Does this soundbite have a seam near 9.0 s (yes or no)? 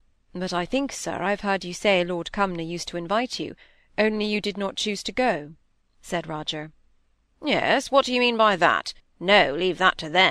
yes